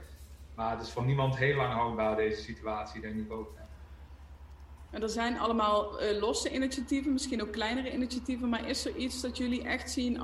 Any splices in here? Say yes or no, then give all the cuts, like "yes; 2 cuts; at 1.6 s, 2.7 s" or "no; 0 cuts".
no; 0 cuts